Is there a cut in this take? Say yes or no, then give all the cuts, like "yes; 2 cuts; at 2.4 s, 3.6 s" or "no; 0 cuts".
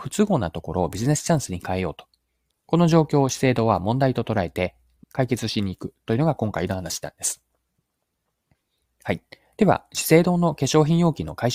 yes; 2 cuts; at 2.5 s, 5.0 s